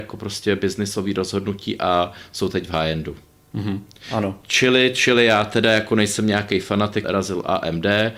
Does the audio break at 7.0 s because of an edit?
yes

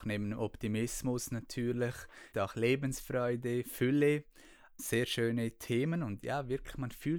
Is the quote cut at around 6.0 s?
no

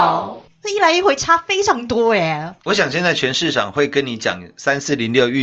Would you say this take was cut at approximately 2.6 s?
yes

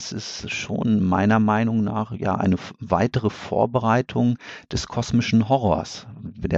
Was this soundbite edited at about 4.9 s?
no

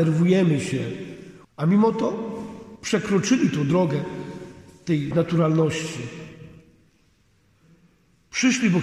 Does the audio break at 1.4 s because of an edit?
yes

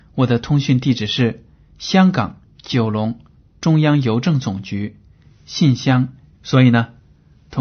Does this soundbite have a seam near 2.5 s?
yes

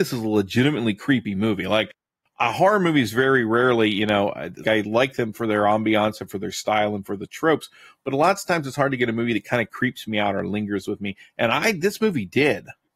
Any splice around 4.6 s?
yes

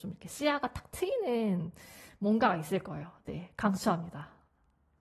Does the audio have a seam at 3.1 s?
no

